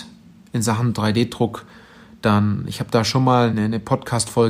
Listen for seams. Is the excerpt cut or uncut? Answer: cut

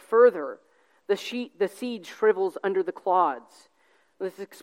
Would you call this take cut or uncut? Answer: uncut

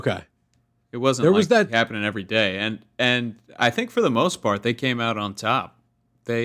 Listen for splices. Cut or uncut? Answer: uncut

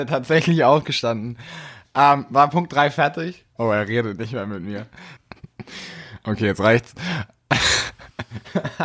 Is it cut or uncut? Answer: cut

